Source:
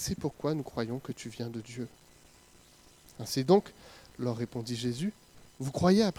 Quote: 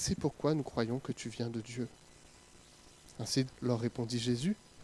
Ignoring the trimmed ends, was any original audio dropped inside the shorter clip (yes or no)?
yes